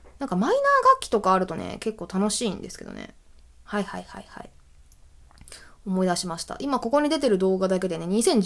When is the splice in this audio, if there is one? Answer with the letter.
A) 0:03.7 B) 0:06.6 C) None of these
A